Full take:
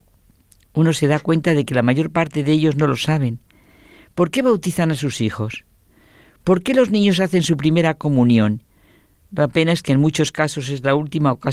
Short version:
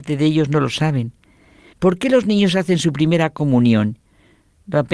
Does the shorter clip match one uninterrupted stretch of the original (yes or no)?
no